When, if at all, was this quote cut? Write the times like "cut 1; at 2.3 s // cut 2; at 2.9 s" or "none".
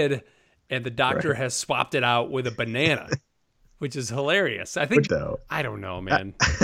cut 1; at 5.1 s